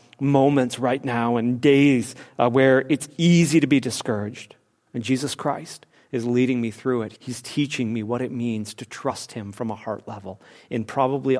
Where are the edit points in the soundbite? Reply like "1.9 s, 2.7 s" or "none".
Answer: 4.9 s, 7.2 s